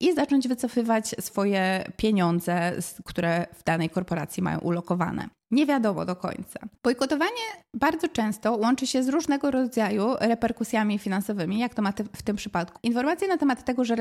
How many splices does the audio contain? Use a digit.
3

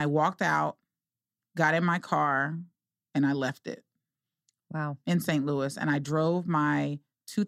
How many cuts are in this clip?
0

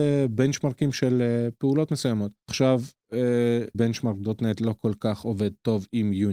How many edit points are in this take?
2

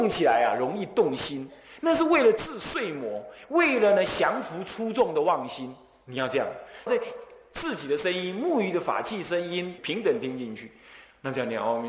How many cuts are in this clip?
2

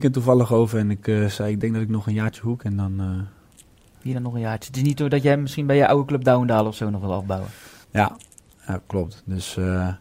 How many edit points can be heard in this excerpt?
2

